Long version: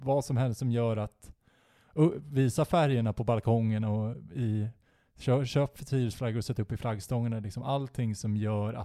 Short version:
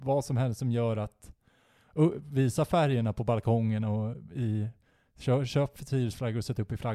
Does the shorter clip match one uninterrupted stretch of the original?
yes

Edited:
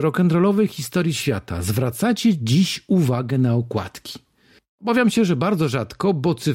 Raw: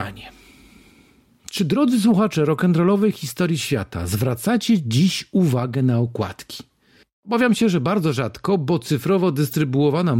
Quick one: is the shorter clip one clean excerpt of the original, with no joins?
yes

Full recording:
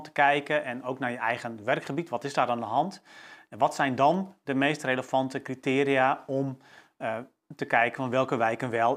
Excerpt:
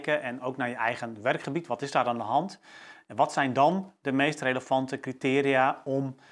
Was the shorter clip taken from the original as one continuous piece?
yes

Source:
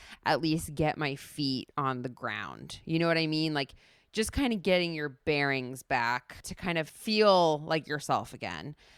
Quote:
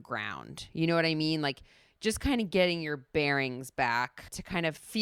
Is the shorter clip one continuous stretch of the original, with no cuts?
yes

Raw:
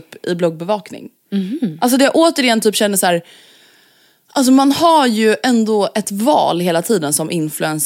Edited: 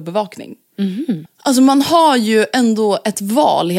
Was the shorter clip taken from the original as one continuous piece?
no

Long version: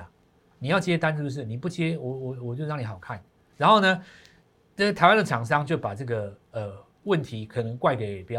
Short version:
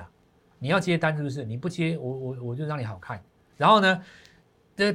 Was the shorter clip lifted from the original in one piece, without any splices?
yes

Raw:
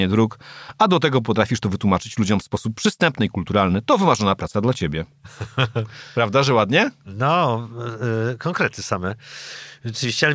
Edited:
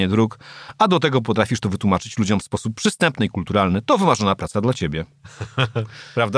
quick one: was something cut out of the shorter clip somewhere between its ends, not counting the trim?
no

